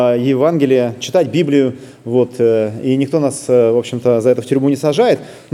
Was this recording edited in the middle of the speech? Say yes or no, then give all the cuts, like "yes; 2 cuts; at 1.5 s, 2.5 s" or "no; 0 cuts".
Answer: no; 0 cuts